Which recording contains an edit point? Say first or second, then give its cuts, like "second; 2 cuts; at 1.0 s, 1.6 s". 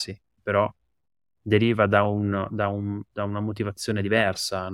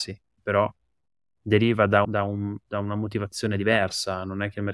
second; 1 cut; at 2.0 s